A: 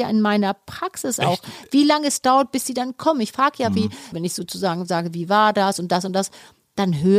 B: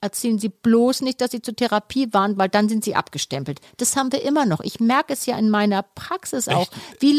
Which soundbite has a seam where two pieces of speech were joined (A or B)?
A